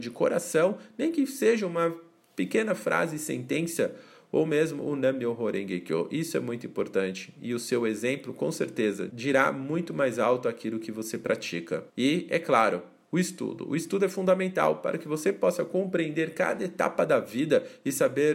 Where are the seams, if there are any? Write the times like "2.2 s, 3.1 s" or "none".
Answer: 9.1 s, 11.9 s